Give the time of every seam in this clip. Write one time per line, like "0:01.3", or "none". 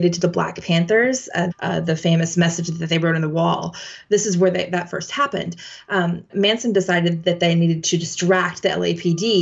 0:01.5
0:06.3